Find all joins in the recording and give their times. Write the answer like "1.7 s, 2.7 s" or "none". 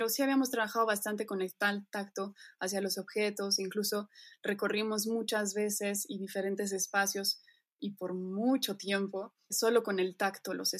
9.5 s